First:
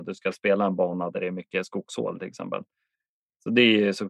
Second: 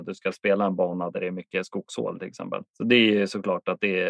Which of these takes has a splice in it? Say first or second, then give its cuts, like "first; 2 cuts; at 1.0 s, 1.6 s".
second; 1 cut; at 2.7 s